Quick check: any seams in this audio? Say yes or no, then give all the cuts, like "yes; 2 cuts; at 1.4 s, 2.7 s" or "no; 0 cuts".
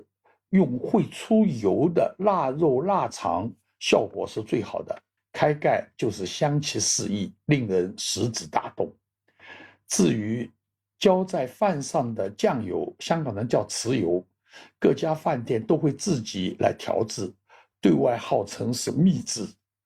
yes; 1 cut; at 5.2 s